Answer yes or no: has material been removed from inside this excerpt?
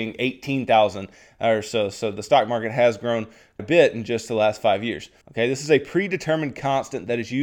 yes